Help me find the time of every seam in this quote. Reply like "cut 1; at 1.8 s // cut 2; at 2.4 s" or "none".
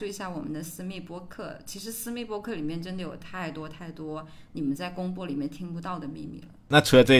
none